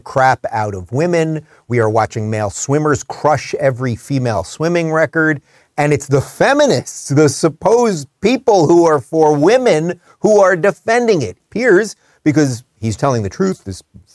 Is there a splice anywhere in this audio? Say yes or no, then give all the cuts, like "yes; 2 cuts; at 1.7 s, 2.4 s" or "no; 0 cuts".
yes; 2 cuts; at 11.4 s, 13.0 s